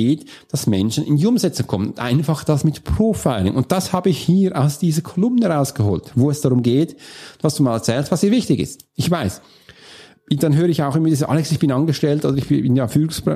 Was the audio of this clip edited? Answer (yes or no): no